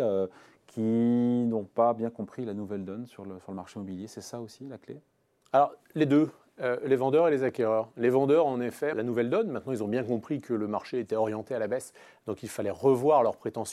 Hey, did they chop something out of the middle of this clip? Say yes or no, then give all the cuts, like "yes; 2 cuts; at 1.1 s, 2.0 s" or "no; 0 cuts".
yes; 1 cut; at 8.9 s